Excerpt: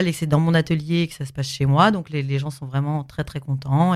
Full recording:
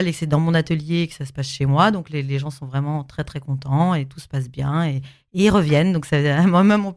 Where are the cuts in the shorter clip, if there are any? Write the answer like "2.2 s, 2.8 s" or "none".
none